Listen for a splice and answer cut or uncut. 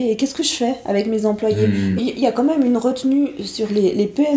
cut